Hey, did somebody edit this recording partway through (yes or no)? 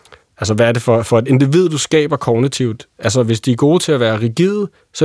no